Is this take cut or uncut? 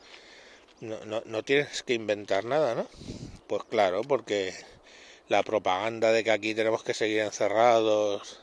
cut